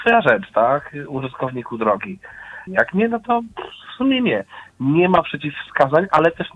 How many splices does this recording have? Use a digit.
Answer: 1